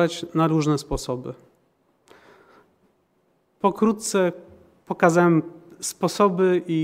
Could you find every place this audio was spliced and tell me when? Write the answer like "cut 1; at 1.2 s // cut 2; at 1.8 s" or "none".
none

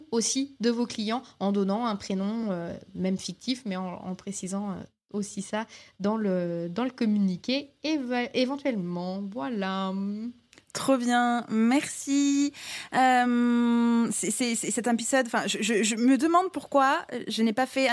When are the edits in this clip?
none

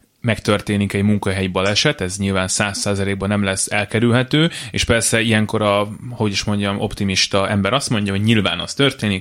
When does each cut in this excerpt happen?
none

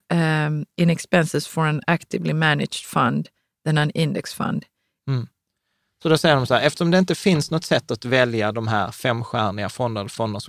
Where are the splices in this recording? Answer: cut 1; at 5.0 s

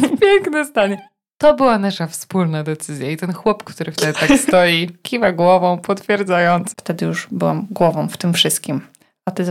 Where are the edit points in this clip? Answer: cut 1; at 5.0 s // cut 2; at 6.7 s

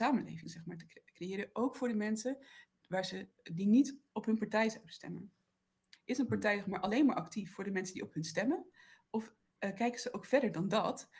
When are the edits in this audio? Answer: cut 1; at 6.0 s

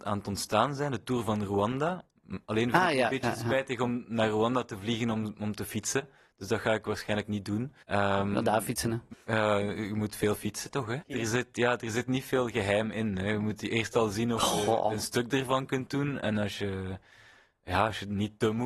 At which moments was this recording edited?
cut 1; at 7.8 s // cut 2; at 9.1 s // cut 3; at 11.0 s

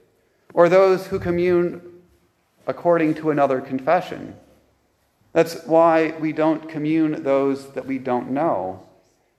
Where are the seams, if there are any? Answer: cut 1; at 5.2 s

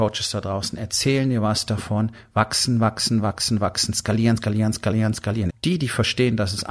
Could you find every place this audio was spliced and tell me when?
cut 1; at 4.4 s // cut 2; at 5.5 s

